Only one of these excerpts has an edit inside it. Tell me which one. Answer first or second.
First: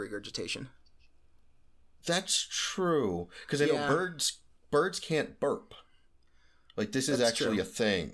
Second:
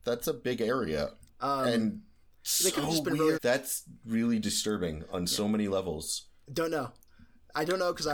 second